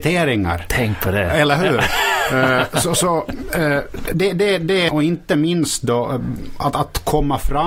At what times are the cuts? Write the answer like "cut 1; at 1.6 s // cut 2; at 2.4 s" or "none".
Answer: cut 1; at 4.9 s